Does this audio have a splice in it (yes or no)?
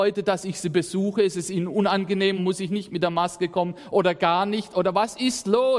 yes